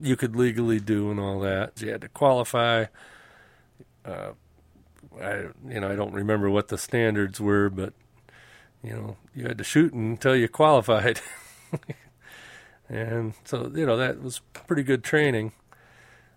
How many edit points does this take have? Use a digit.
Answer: 1